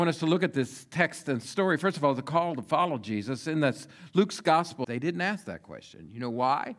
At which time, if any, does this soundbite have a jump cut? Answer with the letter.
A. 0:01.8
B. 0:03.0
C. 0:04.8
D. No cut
C